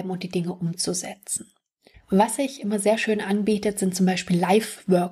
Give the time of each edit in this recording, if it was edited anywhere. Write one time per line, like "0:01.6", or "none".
0:01.9